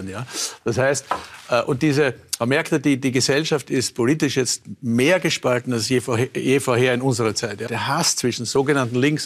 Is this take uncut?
no; 1 cut; at 7.7 s

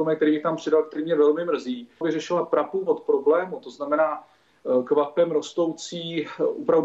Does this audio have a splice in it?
yes; 1 cut; at 2.0 s

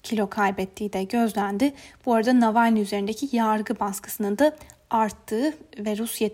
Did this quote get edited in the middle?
no; 0 cuts

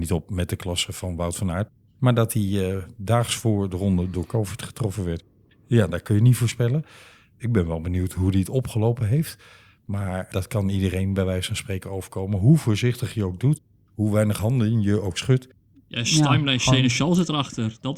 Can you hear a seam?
yes; 1 cut; at 15.7 s

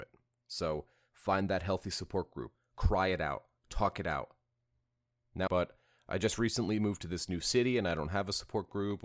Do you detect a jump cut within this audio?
yes; 1 cut; at 5.5 s

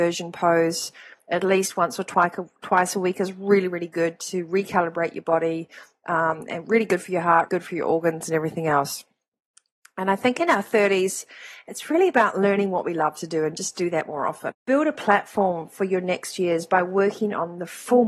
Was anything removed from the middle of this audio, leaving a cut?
yes; 2 cuts; at 7.5 s, 14.5 s

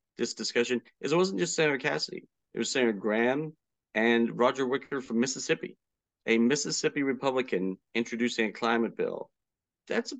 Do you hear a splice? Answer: no; 0 cuts

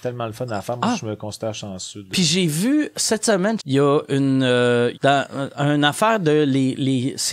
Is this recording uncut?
no; 2 cuts; at 3.6 s, 4.9 s

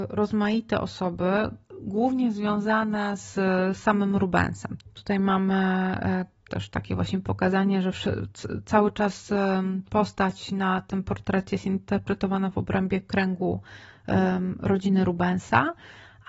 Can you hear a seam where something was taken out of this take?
yes; 1 cut; at 4.8 s

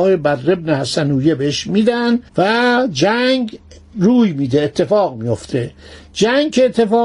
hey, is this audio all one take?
no; 1 cut; at 2.3 s

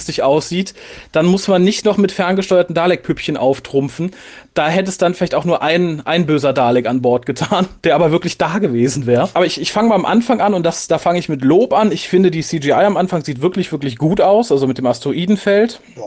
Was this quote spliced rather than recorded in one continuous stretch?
no; 0 cuts

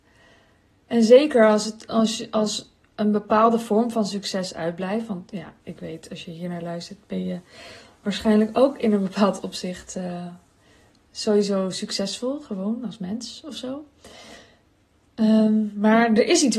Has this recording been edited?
no; 0 cuts

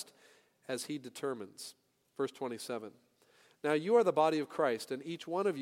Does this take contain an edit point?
no; 0 cuts

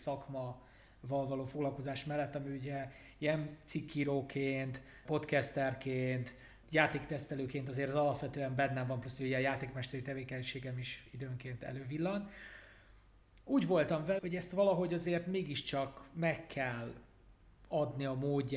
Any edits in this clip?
yes; 1 cut; at 14.2 s

